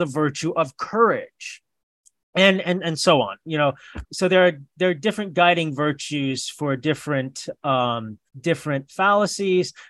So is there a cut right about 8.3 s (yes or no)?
yes